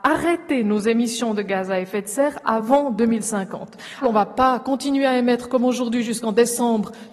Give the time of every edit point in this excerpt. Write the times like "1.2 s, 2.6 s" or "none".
4.0 s